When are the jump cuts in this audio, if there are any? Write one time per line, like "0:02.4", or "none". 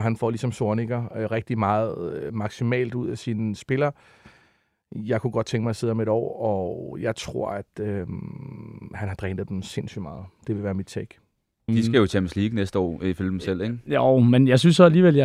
0:11.7